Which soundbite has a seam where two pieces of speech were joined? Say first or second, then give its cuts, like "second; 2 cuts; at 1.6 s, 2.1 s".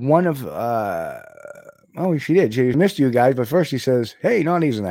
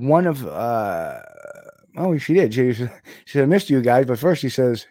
first; 1 cut; at 2.7 s